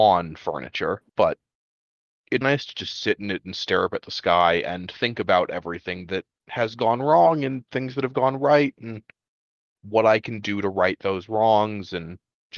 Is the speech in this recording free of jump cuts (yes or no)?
no